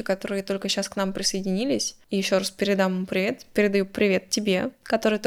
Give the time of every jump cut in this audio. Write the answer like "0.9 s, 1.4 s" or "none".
none